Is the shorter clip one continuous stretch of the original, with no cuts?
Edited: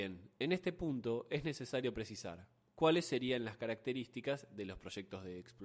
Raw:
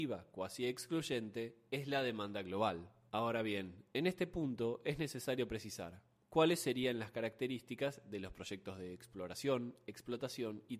yes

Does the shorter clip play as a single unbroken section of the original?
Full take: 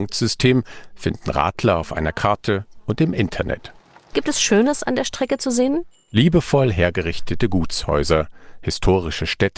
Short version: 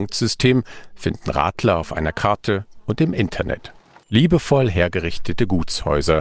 no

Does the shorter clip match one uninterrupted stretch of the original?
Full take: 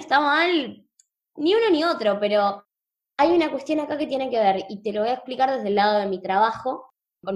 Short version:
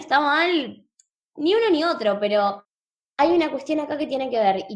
yes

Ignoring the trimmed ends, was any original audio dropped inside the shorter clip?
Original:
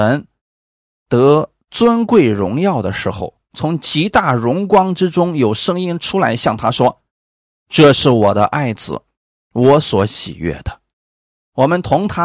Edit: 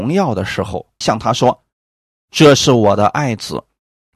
yes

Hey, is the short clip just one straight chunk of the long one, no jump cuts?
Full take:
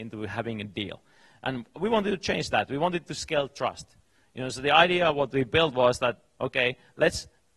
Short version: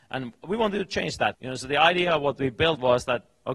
no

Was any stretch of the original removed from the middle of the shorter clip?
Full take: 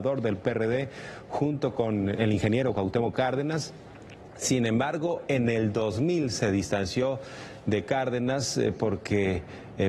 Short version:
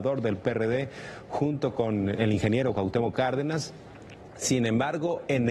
no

